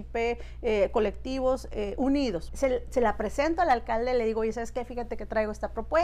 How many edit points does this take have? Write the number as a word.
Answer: one